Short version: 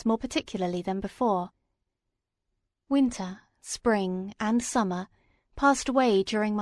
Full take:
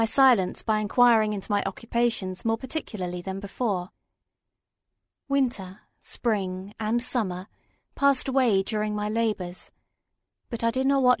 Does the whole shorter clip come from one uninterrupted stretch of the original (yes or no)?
yes